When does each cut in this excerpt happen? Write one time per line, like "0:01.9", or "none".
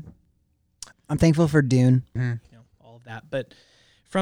0:00.9
0:02.2